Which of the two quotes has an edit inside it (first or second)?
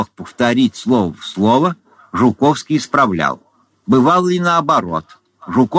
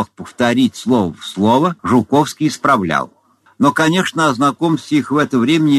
second